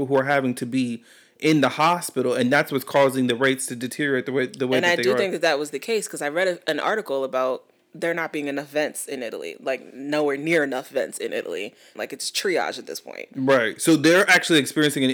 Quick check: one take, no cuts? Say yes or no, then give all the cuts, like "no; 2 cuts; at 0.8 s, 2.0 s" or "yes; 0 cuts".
no; 1 cut; at 12.0 s